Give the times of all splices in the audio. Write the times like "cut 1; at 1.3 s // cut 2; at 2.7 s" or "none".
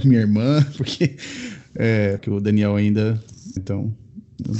cut 1; at 2.2 s // cut 2; at 3.6 s